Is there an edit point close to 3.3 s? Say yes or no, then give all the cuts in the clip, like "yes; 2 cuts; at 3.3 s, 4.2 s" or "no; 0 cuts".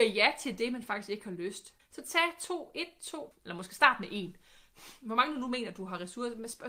yes; 2 cuts; at 1.8 s, 3.3 s